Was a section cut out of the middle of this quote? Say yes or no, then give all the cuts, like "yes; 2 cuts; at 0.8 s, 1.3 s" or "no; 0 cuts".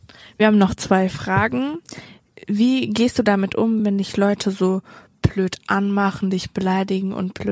no; 0 cuts